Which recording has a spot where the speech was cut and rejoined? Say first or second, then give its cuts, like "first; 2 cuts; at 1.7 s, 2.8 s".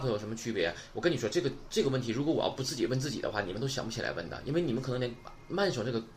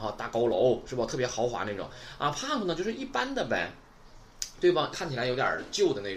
second; 1 cut; at 4.9 s